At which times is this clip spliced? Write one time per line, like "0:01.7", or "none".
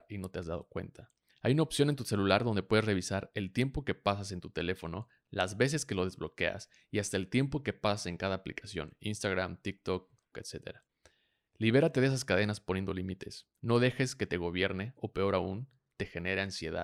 0:10.3